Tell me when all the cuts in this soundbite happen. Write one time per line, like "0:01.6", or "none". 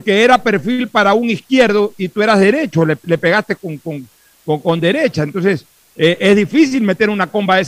none

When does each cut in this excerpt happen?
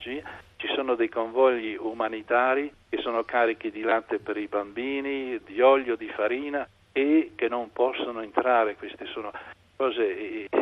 0:05.4
0:08.8

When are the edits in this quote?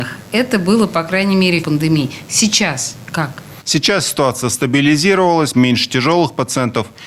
0:01.6
0:03.6
0:05.5

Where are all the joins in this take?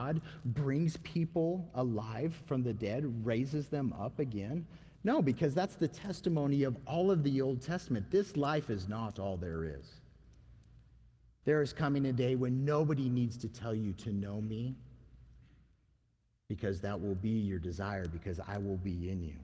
0:11.4

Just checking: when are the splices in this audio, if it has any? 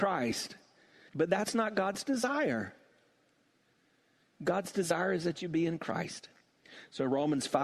0:01.1

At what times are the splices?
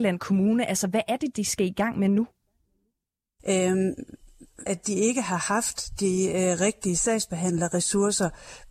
0:03.4
0:04.7

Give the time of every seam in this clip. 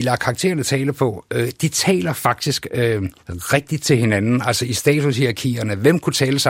0:03.2

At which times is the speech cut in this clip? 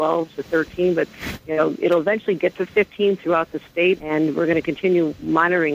0:04.0

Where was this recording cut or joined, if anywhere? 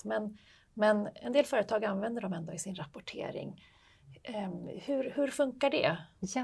none

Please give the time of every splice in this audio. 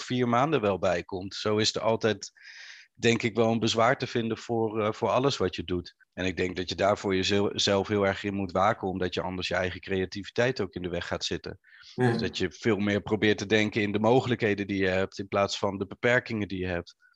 0:06.0

